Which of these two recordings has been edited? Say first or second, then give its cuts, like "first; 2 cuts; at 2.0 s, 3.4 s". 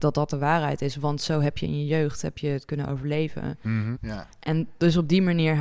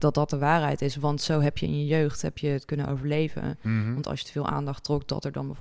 first; 1 cut; at 4.0 s